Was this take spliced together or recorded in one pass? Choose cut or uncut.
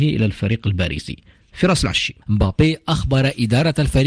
cut